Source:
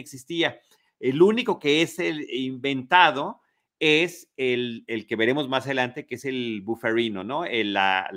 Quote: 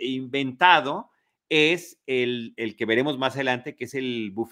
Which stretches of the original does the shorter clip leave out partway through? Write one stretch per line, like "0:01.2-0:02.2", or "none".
none